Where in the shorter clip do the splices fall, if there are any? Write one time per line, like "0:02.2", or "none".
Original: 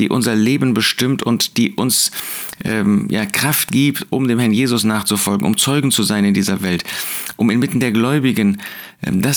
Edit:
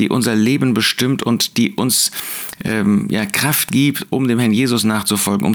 none